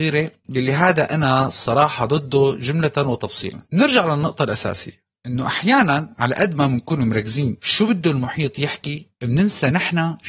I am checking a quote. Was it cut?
yes; 2 cuts; at 3.7 s, 7.6 s

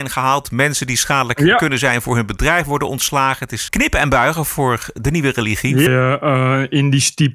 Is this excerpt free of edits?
no; 2 cuts; at 3.7 s, 5.9 s

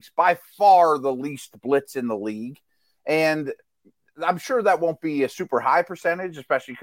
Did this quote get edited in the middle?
no; 0 cuts

